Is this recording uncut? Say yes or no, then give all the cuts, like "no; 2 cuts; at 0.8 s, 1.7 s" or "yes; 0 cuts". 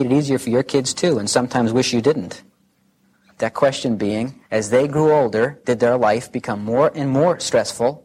no; 2 cuts; at 3.3 s, 4.5 s